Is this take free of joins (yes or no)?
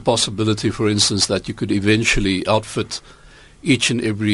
yes